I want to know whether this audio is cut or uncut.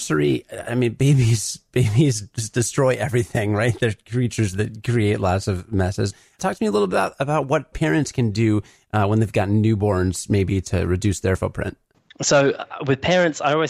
uncut